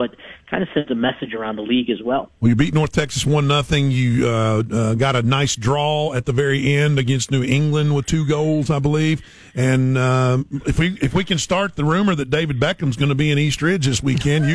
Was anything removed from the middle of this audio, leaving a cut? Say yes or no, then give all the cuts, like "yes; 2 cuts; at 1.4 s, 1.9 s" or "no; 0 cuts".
no; 0 cuts